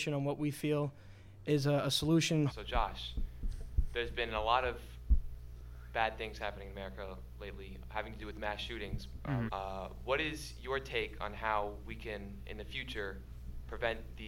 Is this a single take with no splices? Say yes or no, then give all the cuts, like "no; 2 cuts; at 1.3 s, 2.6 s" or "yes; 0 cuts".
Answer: no; 3 cuts; at 2.5 s, 7.8 s, 9.5 s